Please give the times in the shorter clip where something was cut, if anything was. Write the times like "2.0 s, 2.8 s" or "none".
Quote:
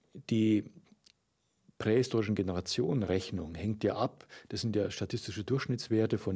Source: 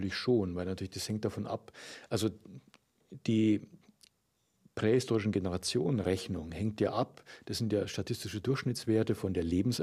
none